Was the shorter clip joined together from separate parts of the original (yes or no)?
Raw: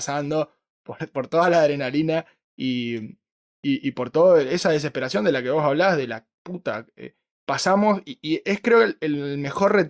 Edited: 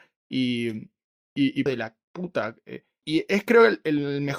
yes